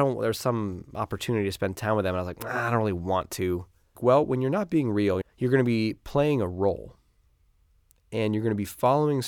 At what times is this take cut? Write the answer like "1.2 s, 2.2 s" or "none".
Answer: 3.9 s, 5.2 s